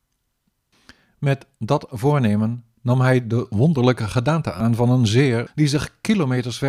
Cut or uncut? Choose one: cut